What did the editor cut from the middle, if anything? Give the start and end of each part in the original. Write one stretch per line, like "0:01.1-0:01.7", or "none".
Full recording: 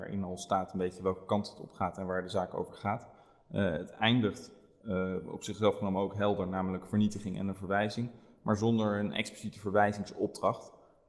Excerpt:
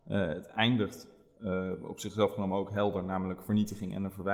none